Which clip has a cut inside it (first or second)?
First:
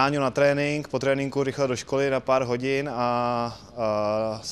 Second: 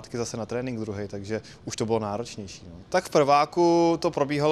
second